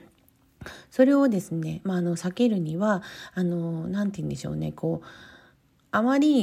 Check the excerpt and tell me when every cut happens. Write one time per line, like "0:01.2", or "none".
none